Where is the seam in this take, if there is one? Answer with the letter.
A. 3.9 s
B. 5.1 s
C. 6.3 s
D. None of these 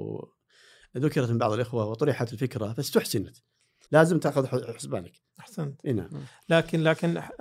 A